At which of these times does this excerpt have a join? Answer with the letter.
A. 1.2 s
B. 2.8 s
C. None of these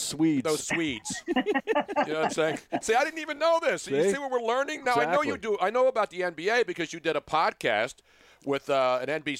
B